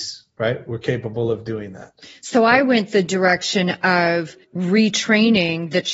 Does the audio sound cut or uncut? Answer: cut